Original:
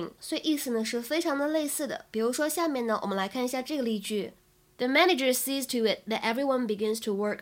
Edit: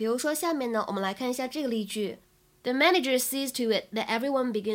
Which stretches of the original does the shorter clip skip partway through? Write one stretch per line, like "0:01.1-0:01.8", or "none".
none

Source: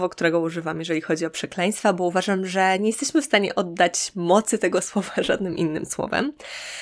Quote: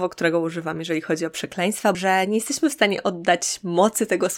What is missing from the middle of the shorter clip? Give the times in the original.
0:01.9-0:02.5

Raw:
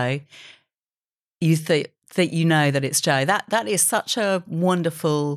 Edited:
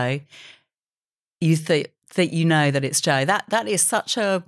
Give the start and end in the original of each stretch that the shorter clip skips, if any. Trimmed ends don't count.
none

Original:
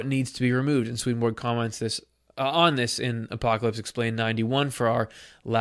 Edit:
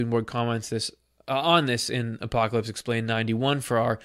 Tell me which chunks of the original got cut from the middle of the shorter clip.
none

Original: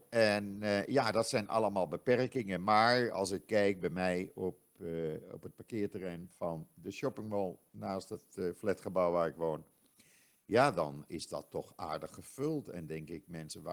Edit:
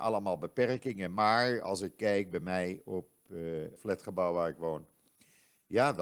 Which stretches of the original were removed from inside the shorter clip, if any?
0:05.3-0:08.5

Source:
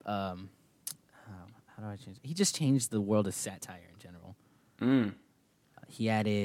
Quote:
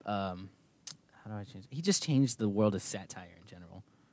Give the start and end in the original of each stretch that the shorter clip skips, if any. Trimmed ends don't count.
0:01.2-0:01.7

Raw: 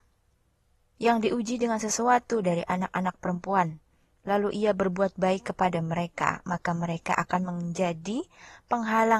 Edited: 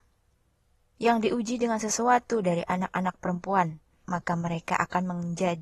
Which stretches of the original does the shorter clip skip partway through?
0:04.0-0:06.4

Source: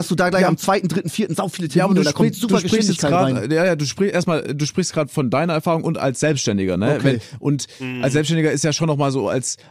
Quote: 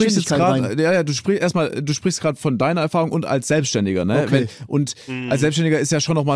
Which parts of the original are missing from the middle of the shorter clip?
none

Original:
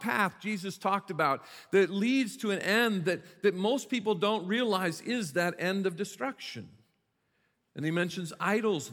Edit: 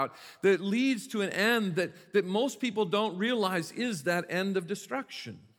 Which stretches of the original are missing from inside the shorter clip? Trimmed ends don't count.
none

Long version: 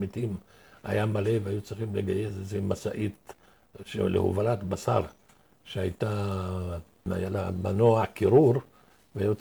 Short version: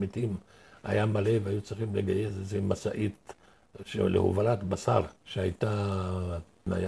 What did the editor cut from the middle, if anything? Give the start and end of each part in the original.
0:05.2-0:05.6

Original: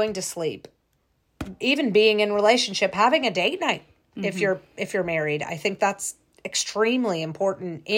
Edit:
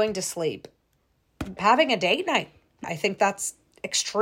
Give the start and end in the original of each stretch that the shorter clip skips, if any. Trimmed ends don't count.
0:01.6-0:02.9
0:04.2-0:05.4

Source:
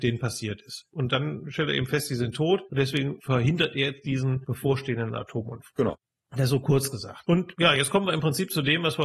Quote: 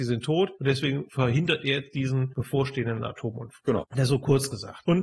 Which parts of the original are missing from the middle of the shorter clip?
0:06.0-0:06.3

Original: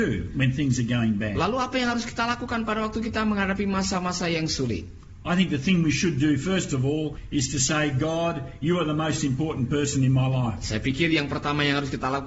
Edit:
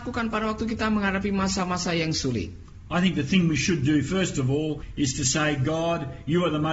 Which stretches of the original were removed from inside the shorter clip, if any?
none

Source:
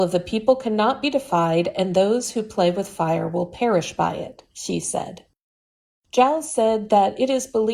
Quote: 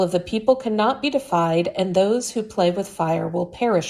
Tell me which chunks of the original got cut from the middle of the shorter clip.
none

